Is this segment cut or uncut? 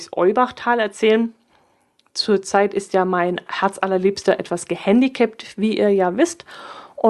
uncut